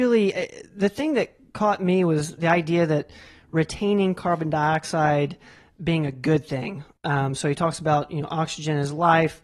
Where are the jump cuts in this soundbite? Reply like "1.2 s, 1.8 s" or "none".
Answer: 2.4 s